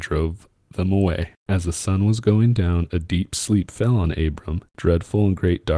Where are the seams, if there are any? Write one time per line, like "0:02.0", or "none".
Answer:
0:01.4
0:04.7